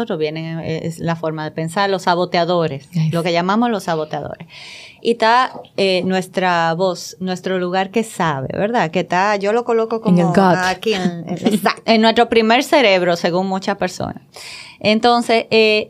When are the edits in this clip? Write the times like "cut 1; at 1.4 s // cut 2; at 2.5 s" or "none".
cut 1; at 11.9 s

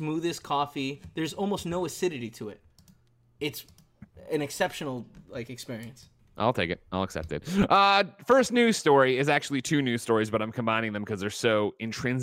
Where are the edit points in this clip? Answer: cut 1; at 6.2 s

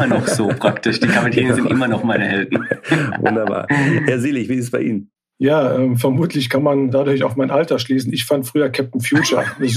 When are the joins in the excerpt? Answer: none

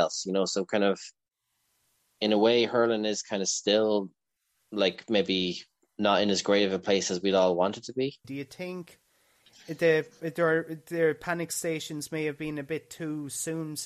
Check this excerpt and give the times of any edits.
cut 1; at 8.2 s

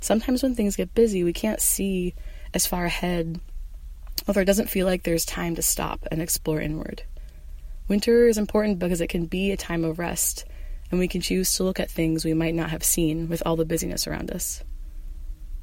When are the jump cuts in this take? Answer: none

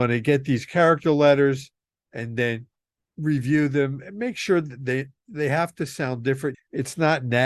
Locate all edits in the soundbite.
cut 1; at 6.5 s

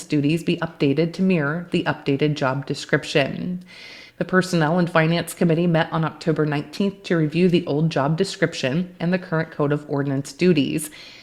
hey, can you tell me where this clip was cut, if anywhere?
cut 1; at 4.1 s // cut 2; at 9.0 s

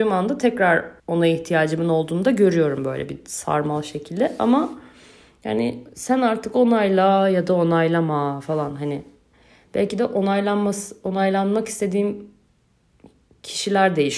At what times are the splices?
cut 1; at 1.0 s

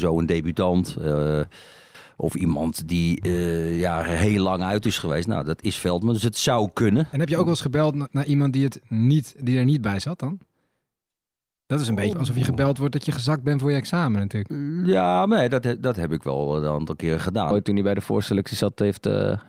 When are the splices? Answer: cut 1; at 12.1 s // cut 2; at 17.5 s

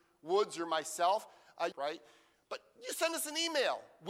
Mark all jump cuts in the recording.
cut 1; at 1.7 s

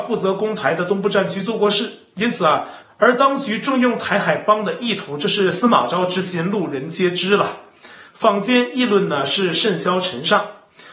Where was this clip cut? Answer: cut 1; at 2.8 s // cut 2; at 8.1 s

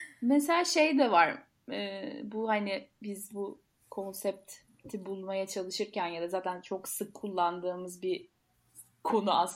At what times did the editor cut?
none

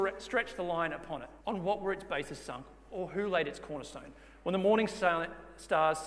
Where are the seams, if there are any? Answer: cut 1; at 1.4 s

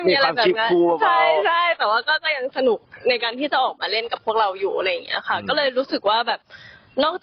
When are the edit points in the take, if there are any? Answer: none

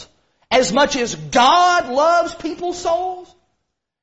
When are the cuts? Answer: none

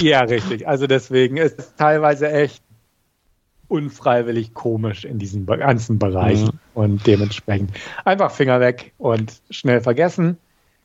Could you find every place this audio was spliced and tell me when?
cut 1; at 1.6 s

